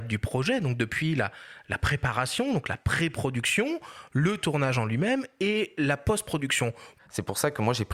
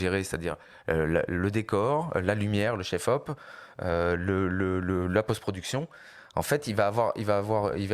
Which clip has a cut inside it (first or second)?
first